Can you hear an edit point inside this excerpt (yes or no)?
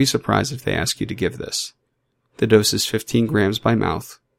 no